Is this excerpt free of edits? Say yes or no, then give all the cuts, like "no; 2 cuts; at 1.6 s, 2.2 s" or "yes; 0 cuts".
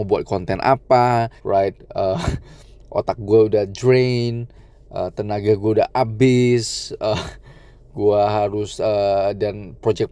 no; 1 cut; at 1.4 s